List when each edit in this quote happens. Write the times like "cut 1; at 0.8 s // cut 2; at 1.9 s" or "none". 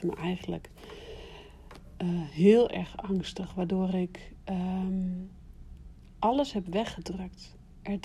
none